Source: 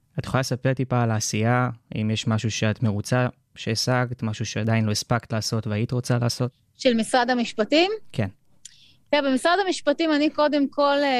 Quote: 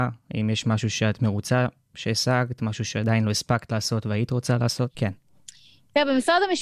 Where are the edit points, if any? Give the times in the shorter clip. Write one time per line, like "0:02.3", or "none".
0:04.9